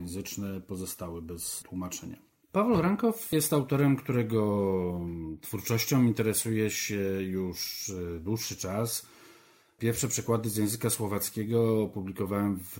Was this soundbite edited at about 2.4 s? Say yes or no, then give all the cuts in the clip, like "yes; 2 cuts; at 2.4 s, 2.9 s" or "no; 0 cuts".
yes; 1 cut; at 2.4 s